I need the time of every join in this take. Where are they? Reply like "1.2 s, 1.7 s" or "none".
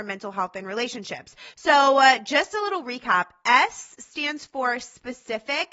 1.5 s